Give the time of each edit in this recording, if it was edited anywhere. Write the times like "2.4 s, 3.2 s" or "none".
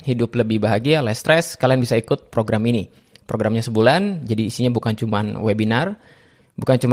none